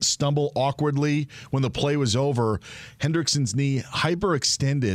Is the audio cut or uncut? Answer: uncut